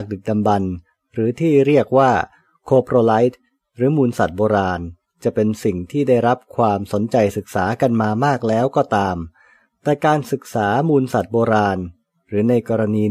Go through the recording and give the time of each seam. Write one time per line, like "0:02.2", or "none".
none